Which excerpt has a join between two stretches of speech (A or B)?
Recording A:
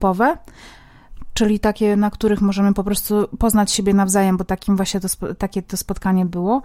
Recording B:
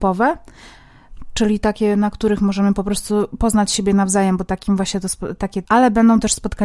B